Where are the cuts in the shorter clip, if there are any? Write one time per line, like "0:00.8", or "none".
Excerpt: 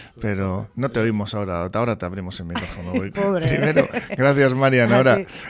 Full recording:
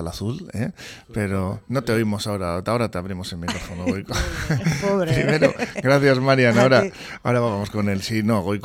0:03.1